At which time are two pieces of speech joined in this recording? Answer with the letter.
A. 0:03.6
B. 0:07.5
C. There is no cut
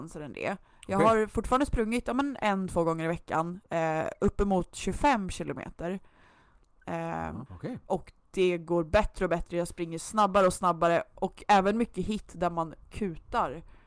B